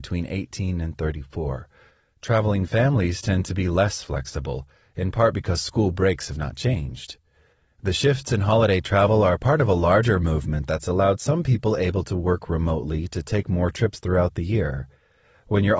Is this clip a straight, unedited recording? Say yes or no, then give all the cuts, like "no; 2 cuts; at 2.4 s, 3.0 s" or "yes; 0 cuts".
yes; 0 cuts